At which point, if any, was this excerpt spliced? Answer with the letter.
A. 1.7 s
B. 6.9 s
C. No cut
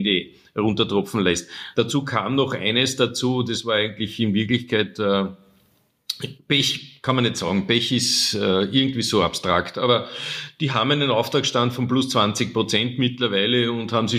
A